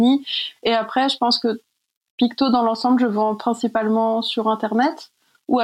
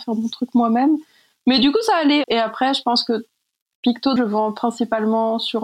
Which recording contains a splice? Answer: second; 2 cuts; at 2.2 s, 4.2 s

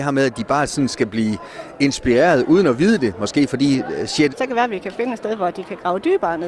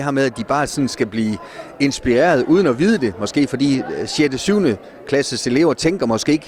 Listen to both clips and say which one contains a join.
first; 1 cut; at 4.3 s

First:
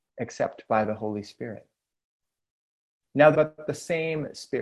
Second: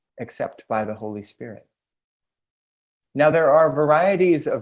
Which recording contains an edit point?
first; 1 cut; at 3.3 s

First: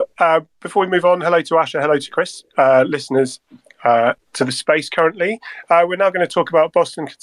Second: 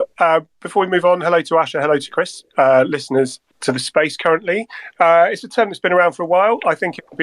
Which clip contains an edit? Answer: second; 2 cuts; at 3.5 s, 4.9 s

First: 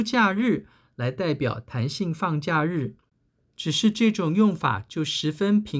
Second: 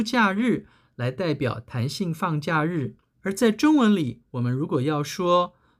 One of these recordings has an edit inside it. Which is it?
second; 1 cut; at 3.1 s

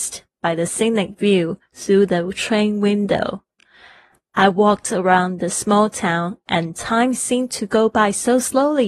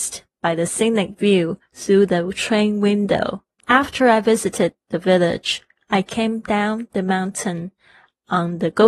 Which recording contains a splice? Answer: second; 1 cut; at 3.6 s

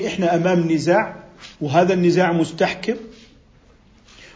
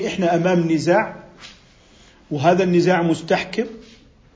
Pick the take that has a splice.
first; 1 cut; at 1.5 s

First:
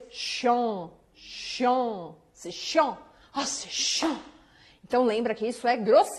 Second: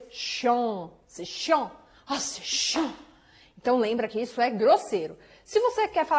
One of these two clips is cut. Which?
second; 1 cut; at 1.0 s

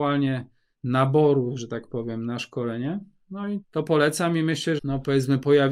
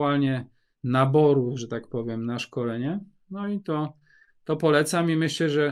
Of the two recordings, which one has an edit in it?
first; 2 cuts; at 3.6 s, 4.8 s

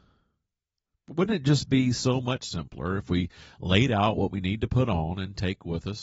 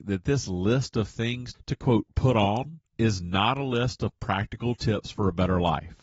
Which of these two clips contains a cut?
second; 2 cuts; at 1.5 s, 2.9 s

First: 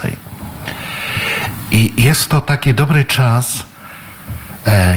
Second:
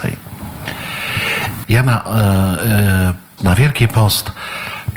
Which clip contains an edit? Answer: second; 2 cuts; at 1.6 s, 3.4 s

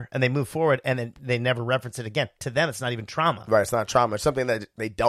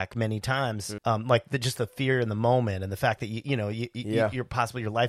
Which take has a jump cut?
second; 1 cut; at 1.0 s

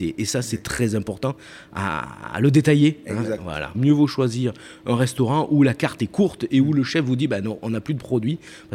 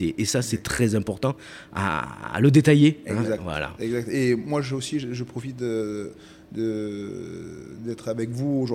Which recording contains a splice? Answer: first; 1 cut; at 3.7 s

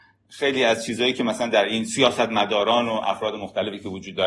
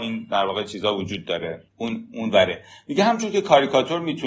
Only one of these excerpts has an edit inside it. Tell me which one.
second; 1 cut; at 1.7 s

